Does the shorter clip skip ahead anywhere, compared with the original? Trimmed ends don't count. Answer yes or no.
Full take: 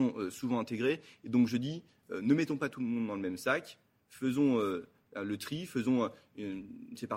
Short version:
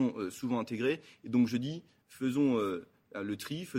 yes